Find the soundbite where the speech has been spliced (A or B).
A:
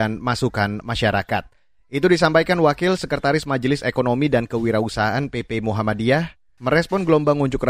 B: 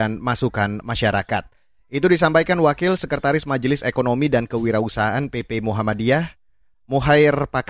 A